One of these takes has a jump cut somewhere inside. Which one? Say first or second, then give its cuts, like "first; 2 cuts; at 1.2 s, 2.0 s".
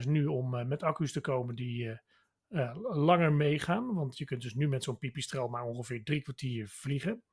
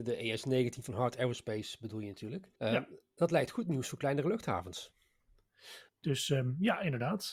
second; 2 cuts; at 2.6 s, 5.9 s